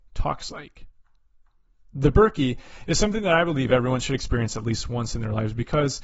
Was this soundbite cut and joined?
no; 0 cuts

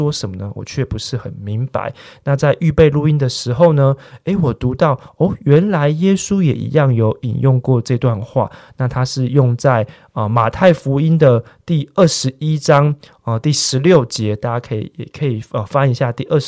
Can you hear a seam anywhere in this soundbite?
no; 0 cuts

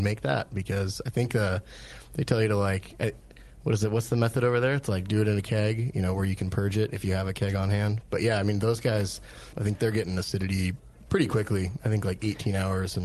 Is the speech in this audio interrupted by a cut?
yes; 1 cut; at 9.5 s

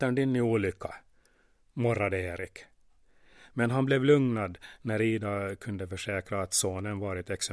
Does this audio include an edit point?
no; 0 cuts

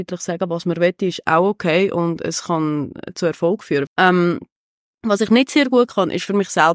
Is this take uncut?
no; 1 cut; at 3.9 s

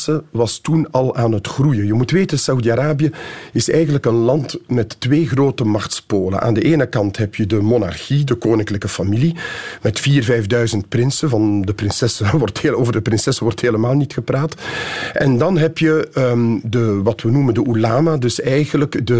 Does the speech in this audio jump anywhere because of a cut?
no; 0 cuts

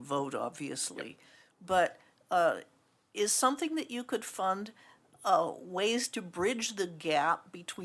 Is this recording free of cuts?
yes; 0 cuts

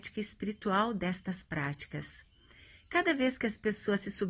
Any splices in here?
no; 0 cuts

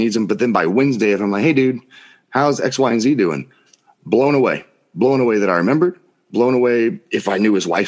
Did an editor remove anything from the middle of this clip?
no; 0 cuts

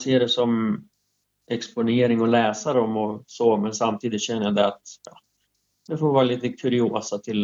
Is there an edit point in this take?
no; 0 cuts

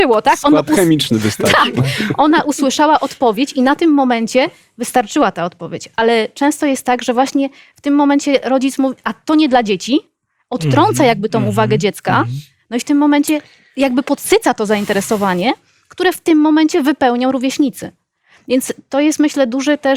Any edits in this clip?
no; 0 cuts

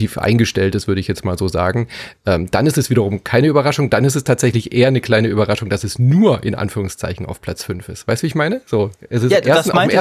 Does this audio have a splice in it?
no; 0 cuts

